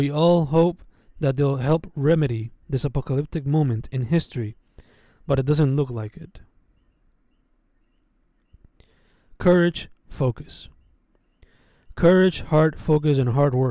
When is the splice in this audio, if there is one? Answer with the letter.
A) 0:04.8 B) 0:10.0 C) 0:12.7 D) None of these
B